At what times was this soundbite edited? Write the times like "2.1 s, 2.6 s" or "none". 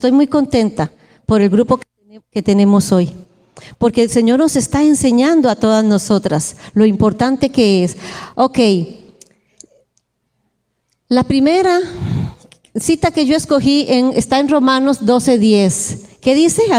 none